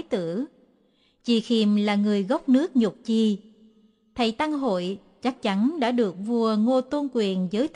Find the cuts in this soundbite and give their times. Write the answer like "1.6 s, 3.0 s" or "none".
none